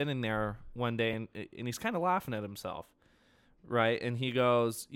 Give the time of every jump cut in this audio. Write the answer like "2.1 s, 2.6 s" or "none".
none

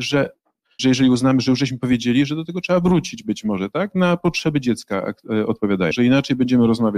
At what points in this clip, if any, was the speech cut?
5.9 s

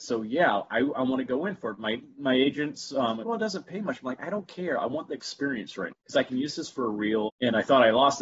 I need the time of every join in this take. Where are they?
3.2 s, 5.9 s, 7.3 s

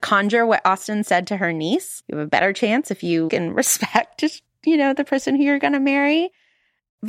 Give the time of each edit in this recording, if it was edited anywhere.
2.0 s, 3.3 s

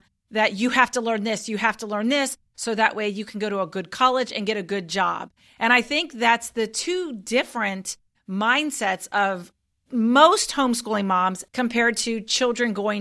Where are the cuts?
11.5 s

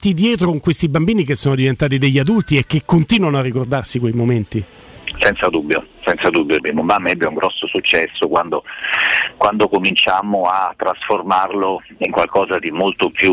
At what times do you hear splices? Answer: 6.6 s

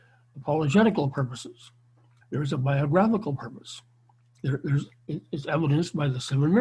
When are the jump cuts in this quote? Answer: 2.2 s, 4.4 s

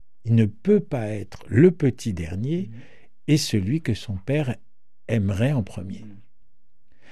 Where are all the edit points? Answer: none

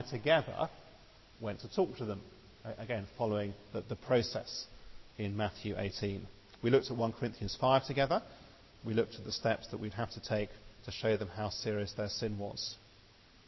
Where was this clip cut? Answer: none

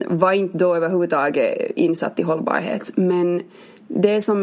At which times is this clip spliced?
none

